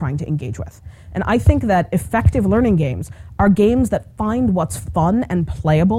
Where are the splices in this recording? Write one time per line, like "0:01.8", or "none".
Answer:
none